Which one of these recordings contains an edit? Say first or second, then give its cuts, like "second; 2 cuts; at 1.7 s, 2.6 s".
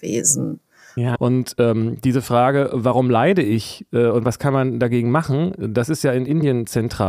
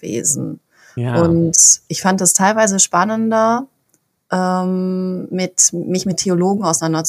first; 1 cut; at 1.1 s